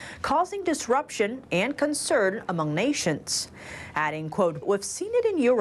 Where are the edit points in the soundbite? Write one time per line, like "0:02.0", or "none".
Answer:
0:04.6

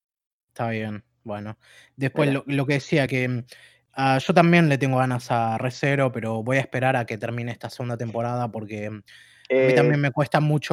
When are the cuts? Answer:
none

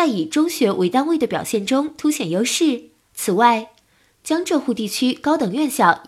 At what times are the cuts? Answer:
0:03.0

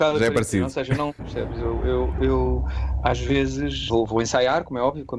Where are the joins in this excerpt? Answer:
0:01.2
0:03.9

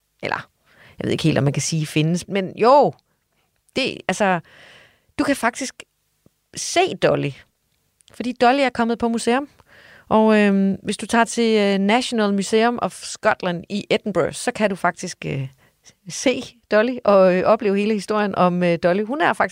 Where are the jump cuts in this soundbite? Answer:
0:02.2

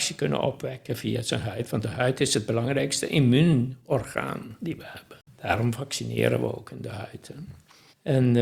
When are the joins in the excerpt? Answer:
none

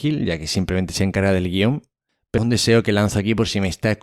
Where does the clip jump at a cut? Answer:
0:02.4

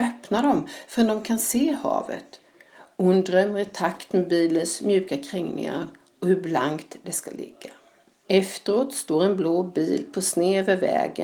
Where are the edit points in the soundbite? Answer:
0:08.2

